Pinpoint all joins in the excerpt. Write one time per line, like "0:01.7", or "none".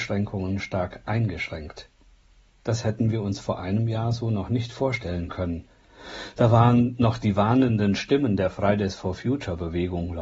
none